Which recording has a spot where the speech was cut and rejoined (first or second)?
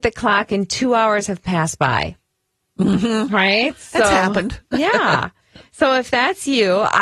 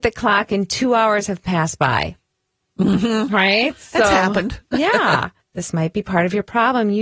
second